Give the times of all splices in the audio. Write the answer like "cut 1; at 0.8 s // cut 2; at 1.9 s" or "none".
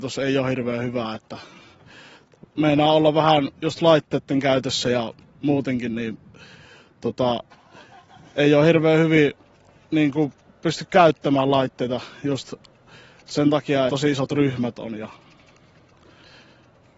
cut 1; at 13.9 s